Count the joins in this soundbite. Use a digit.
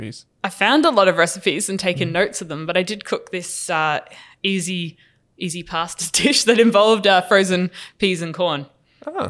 0